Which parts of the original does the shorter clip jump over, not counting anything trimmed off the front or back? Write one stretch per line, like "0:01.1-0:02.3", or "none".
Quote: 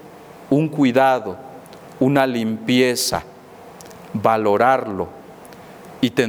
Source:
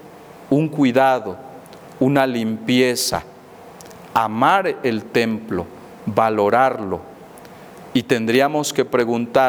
0:04.1-0:06.0